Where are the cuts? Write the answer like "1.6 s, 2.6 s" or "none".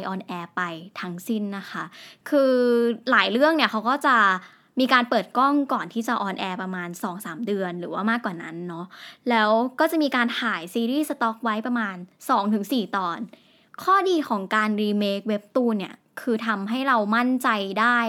none